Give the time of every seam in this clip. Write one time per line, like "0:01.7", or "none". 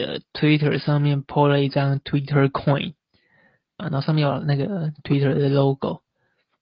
0:03.8